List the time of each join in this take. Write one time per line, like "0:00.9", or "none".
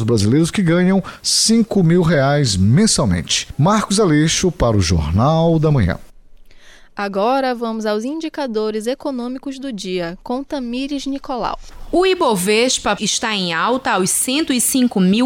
0:13.0